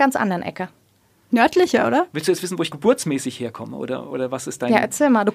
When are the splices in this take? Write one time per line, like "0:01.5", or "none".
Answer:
none